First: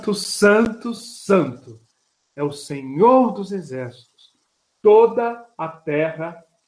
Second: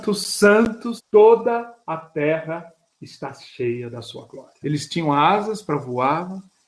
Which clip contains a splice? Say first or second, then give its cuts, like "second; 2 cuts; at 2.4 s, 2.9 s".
second; 2 cuts; at 1.0 s, 4.6 s